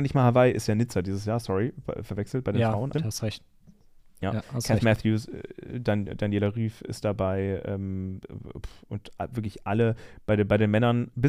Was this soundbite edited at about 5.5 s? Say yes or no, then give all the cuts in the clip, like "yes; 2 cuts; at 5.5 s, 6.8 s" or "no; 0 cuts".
no; 1 cut; at 2.9 s